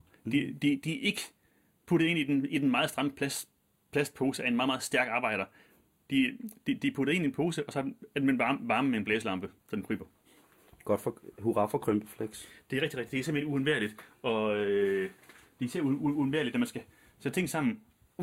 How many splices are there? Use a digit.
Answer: 1